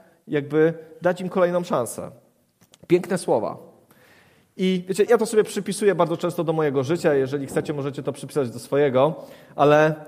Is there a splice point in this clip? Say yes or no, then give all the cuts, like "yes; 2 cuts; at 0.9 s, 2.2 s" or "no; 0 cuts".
yes; 1 cut; at 5.1 s